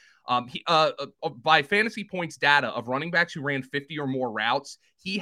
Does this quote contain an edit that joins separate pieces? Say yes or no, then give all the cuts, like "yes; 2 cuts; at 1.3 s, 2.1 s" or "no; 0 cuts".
no; 0 cuts